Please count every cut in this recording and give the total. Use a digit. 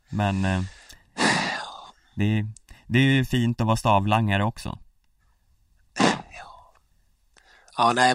0